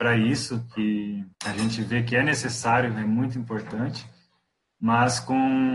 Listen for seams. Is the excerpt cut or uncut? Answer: cut